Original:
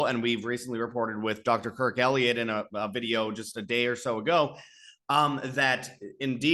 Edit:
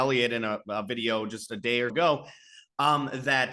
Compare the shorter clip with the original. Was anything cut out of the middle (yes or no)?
yes